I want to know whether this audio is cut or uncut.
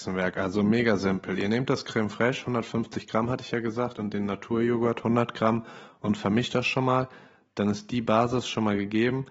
uncut